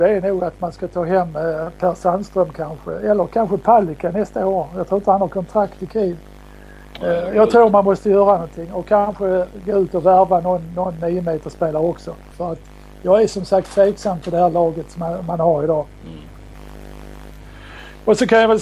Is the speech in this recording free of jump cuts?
no; 1 cut; at 12.3 s

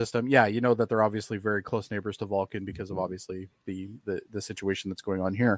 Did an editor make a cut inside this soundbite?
no; 0 cuts

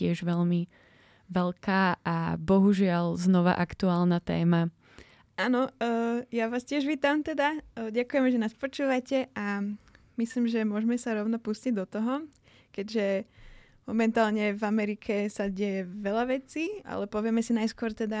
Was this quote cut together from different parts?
yes; 2 cuts; at 5.3 s, 16.8 s

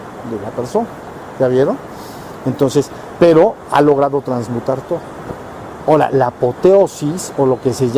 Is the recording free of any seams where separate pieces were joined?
yes; 0 cuts

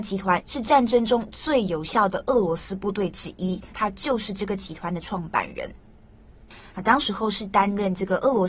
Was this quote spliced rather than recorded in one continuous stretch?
yes; 2 cuts; at 3.7 s, 6.7 s

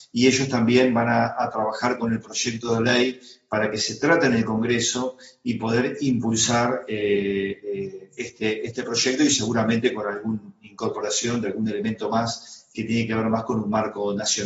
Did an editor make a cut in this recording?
no; 0 cuts

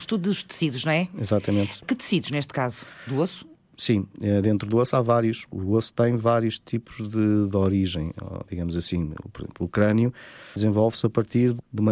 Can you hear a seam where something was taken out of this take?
no; 0 cuts

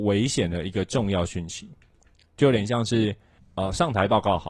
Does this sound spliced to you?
no; 0 cuts

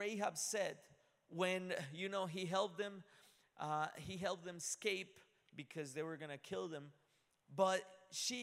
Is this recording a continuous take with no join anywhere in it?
yes; 0 cuts

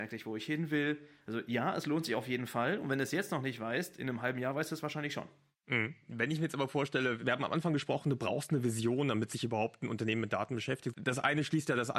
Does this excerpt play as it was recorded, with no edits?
no; 1 cut; at 10.9 s

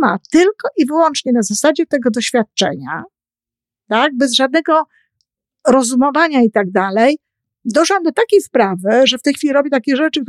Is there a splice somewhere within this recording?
no; 0 cuts

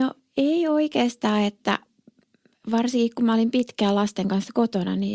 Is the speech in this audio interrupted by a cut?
no; 0 cuts

